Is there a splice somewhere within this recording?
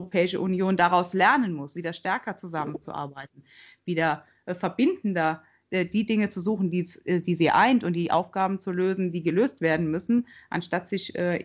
no; 0 cuts

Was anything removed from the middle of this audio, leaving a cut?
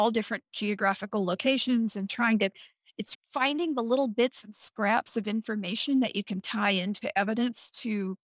yes; 1 cut; at 3.1 s

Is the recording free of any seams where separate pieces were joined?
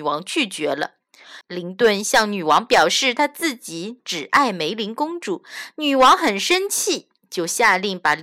no; 1 cut; at 1.4 s

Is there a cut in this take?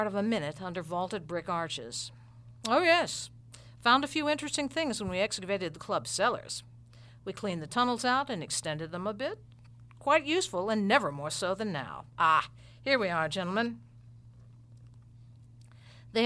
no; 0 cuts

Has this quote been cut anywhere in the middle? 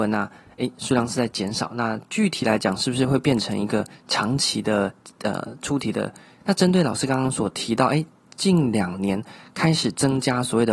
yes; 1 cut; at 6.4 s

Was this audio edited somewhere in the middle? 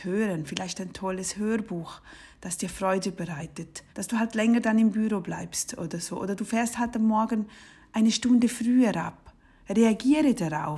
yes; 1 cut; at 3.9 s

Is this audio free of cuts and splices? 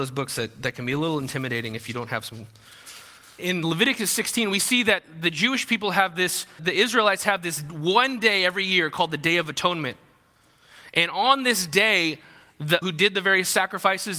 no; 3 cuts; at 3.4 s, 6.6 s, 12.8 s

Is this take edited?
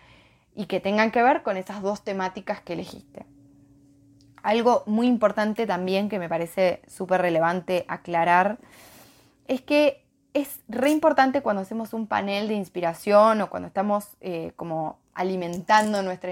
no; 0 cuts

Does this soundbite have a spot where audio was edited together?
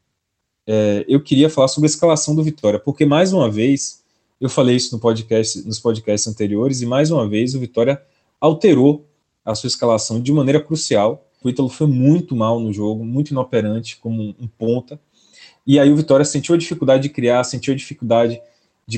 yes; 1 cut; at 11.4 s

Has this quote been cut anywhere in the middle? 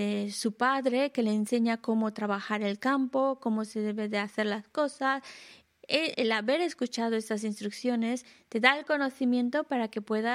yes; 1 cut; at 6.1 s

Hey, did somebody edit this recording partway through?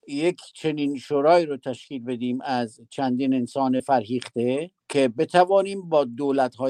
yes; 1 cut; at 4.8 s

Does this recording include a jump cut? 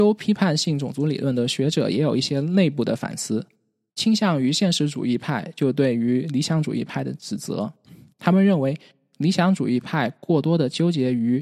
yes; 1 cut; at 3.9 s

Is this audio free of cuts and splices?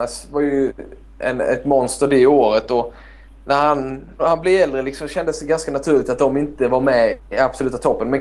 no; 1 cut; at 4.2 s

